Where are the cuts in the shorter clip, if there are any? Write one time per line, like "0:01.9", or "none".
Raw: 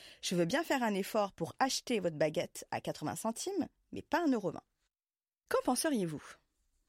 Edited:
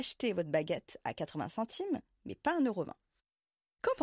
none